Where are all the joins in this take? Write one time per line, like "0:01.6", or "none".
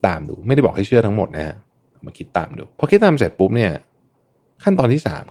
0:02.7